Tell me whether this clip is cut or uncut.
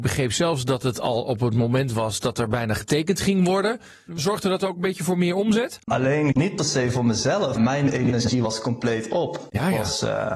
cut